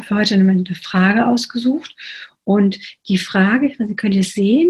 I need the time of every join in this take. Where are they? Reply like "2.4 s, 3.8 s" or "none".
none